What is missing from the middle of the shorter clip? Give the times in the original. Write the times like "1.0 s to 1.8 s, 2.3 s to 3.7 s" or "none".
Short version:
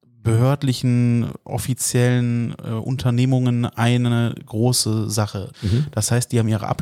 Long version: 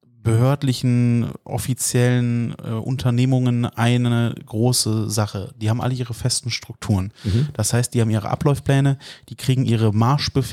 5.5 s to 7.2 s